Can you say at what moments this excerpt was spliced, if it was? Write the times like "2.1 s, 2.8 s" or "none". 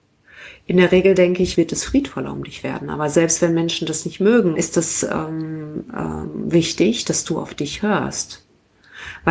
1.6 s, 4.6 s

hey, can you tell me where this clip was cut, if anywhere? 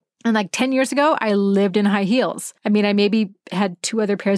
2.6 s

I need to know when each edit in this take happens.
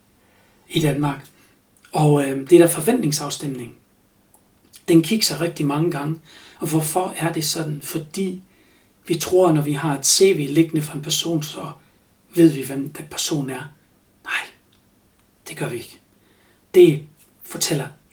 none

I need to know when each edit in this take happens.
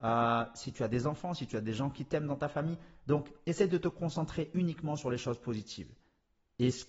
none

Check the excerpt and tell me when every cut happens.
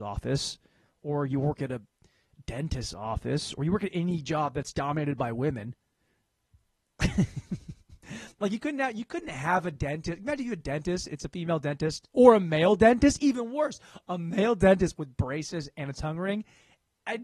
none

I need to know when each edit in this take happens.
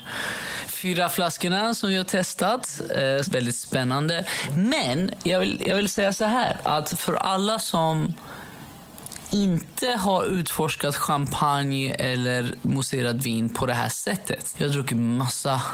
3.2 s, 14.5 s

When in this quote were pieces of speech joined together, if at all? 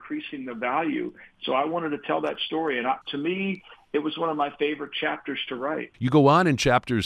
3.0 s, 5.9 s

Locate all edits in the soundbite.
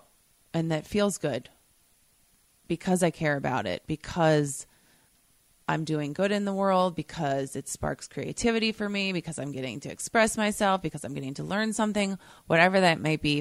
none

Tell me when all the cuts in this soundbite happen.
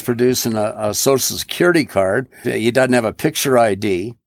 2.4 s

